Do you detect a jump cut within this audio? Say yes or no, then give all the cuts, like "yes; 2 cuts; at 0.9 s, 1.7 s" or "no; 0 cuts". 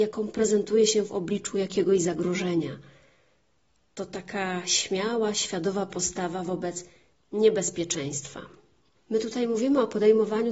yes; 1 cut; at 9.0 s